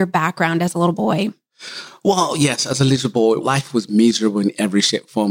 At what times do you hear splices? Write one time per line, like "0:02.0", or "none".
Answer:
0:03.4